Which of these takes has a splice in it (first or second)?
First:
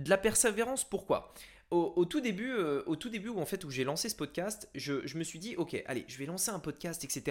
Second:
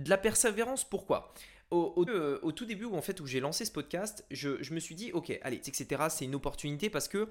second